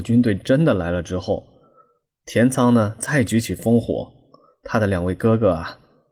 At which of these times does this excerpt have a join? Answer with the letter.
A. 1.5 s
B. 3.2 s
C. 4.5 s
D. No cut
D